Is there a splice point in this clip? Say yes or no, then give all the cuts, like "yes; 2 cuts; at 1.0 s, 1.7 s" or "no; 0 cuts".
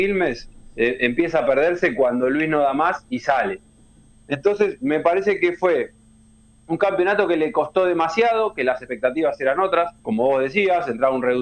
yes; 2 cuts; at 4.1 s, 10.0 s